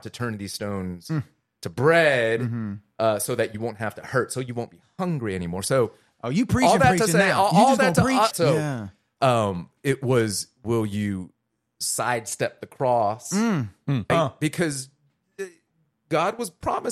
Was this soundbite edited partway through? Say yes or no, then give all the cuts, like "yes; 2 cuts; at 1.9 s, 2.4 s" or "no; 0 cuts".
yes; 2 cuts; at 8.3 s, 14.1 s